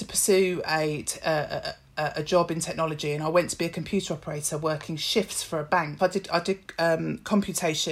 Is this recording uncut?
no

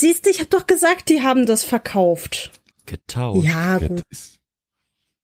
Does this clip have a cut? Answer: yes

